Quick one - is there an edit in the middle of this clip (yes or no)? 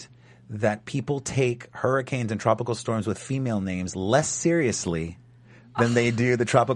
no